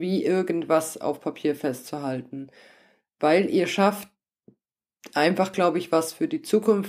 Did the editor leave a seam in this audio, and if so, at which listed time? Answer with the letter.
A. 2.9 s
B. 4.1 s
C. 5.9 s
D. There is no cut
D